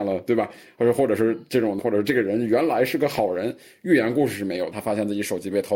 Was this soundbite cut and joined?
yes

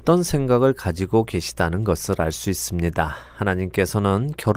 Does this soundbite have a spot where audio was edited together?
no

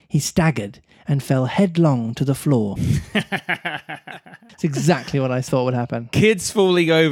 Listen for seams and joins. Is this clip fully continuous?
yes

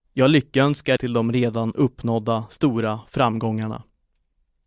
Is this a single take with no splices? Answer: no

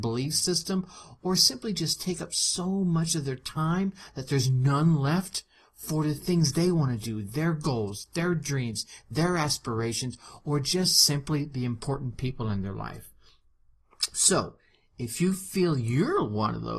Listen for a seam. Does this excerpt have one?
no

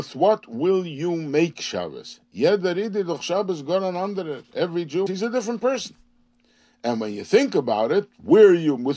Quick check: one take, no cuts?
no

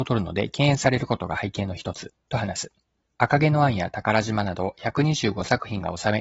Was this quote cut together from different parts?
yes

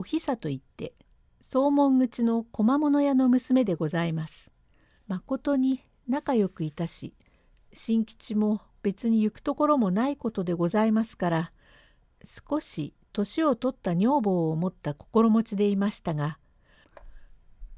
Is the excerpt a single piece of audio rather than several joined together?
no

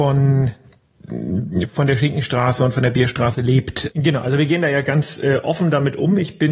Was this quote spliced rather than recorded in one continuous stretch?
yes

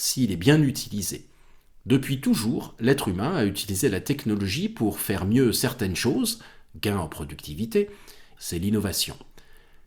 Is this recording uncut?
no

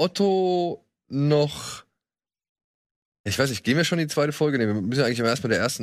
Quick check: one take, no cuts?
yes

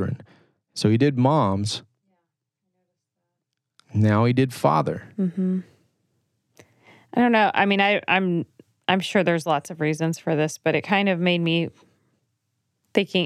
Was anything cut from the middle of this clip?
no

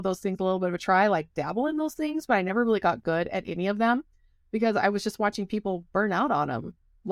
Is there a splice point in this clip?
no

